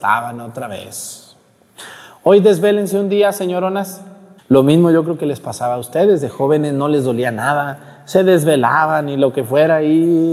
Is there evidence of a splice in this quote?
yes; 1 cut; at 4.4 s

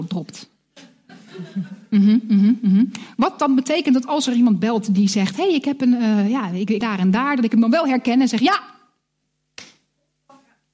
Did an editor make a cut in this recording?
yes; 1 cut; at 6.8 s

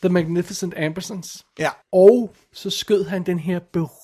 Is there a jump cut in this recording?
yes; 1 cut; at 1.8 s

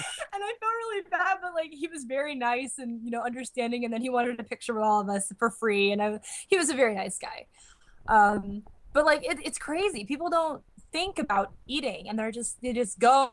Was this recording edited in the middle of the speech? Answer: no; 0 cuts

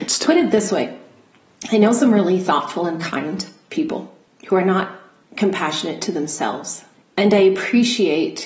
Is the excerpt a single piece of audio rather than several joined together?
no; 1 cut; at 7.0 s

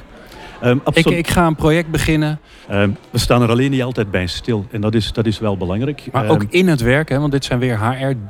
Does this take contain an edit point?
yes; 1 cut; at 2.6 s

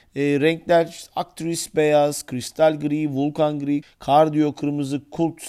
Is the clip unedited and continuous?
no; 1 cut; at 3.8 s

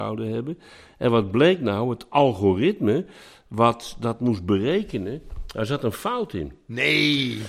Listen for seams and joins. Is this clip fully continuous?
yes; 0 cuts

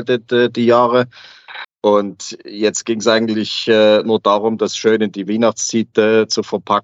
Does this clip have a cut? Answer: yes; 1 cut; at 1.6 s

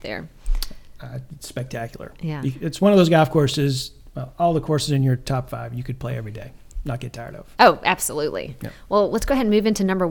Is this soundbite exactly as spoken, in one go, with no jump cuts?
yes; 0 cuts

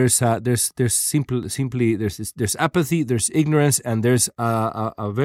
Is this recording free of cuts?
yes; 0 cuts

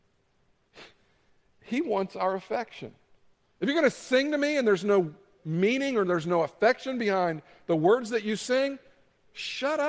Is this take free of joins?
no; 1 cut; at 3.4 s

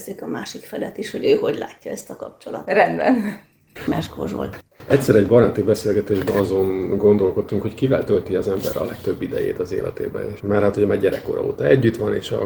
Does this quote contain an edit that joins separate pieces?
yes; 1 cut; at 10.4 s

